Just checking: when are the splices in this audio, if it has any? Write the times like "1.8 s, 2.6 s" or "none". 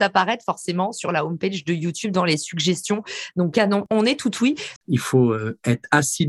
4.8 s